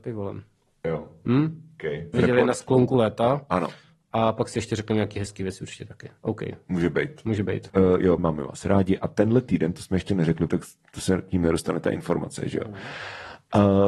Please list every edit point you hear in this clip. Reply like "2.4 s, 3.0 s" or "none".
2.1 s, 8.2 s, 10.5 s